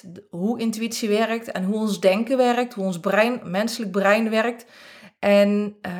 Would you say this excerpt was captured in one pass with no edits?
yes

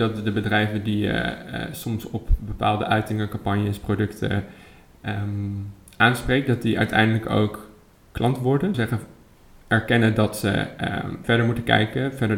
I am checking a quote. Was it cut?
yes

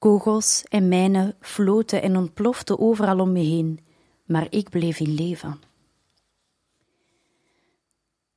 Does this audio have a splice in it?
no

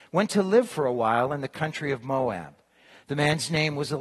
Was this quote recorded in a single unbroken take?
yes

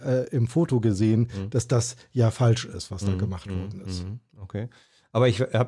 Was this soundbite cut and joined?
no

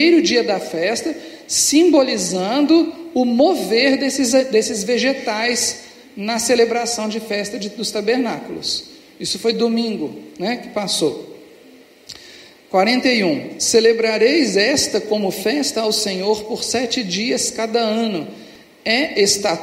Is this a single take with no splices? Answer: yes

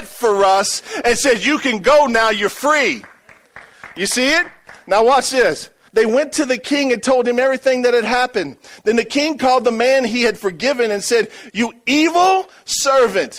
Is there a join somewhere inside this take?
yes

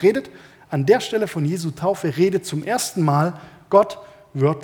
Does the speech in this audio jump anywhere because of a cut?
no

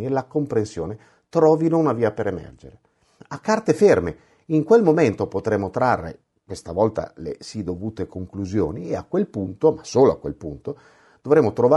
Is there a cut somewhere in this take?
no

